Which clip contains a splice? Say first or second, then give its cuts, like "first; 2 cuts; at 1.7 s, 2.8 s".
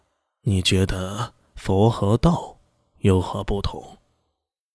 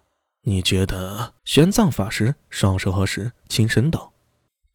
second; 1 cut; at 1.4 s